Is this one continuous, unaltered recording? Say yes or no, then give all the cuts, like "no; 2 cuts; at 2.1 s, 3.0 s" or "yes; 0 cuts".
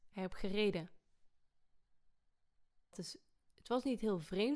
no; 1 cut; at 2.9 s